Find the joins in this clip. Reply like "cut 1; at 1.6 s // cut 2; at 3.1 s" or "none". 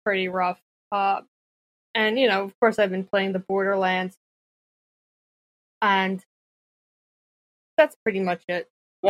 none